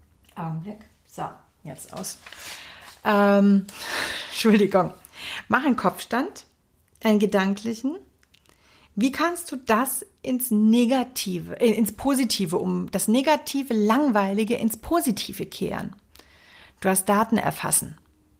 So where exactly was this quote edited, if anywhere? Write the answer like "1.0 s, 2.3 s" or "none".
none